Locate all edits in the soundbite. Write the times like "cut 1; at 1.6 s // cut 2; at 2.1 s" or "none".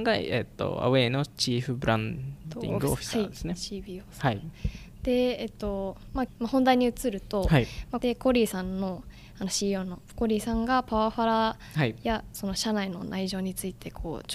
cut 1; at 6.3 s // cut 2; at 8.0 s